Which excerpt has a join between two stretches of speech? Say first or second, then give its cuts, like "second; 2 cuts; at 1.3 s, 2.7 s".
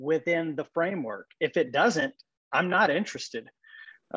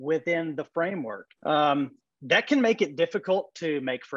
second; 1 cut; at 1.4 s